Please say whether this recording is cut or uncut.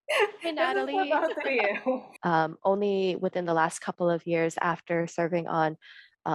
cut